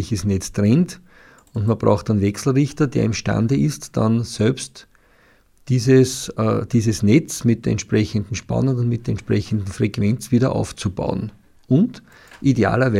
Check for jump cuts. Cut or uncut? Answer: uncut